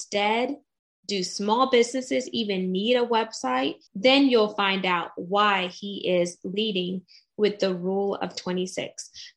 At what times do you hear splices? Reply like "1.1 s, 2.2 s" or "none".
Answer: 3.9 s